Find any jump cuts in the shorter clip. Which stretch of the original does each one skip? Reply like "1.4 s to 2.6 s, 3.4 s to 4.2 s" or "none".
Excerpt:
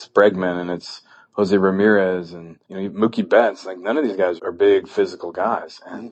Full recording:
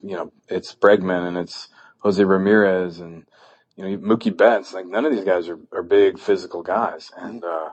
3.3 s to 3.7 s, 5.4 s to 5.7 s